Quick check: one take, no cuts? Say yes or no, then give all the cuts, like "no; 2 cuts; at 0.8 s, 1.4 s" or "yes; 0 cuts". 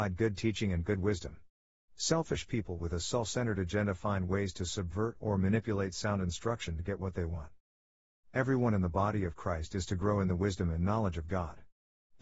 yes; 0 cuts